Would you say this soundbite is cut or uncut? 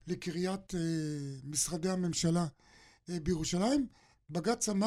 uncut